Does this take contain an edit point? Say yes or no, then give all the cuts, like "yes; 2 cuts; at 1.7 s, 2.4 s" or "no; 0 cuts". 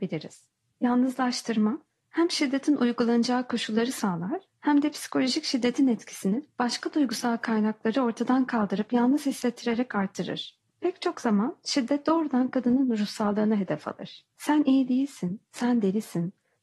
yes; 1 cut; at 10.7 s